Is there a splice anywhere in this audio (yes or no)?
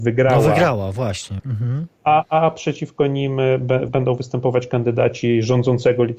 yes